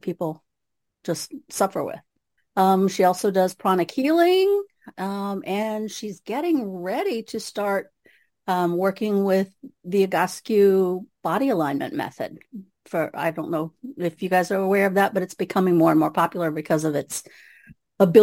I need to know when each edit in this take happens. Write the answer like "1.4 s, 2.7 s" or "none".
2.4 s